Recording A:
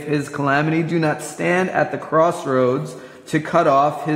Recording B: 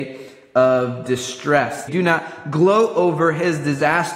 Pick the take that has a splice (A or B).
B